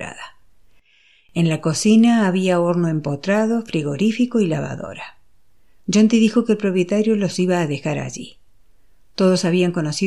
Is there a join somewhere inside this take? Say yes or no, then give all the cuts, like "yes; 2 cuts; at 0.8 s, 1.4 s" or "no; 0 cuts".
no; 0 cuts